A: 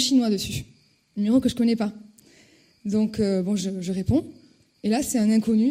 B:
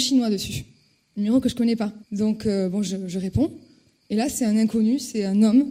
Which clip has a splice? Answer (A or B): B